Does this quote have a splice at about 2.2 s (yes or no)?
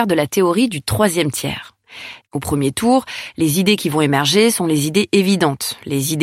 yes